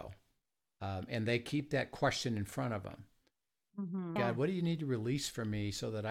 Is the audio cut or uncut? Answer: cut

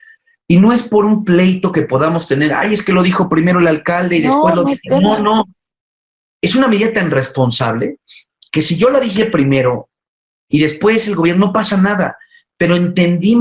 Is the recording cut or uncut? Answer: uncut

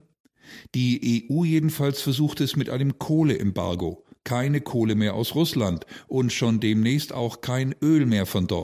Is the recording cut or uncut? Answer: uncut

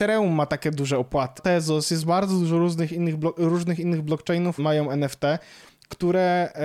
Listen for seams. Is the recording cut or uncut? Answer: cut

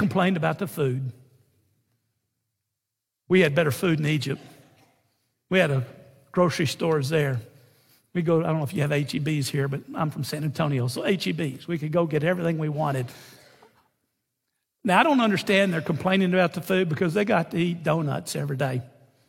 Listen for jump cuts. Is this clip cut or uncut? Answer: uncut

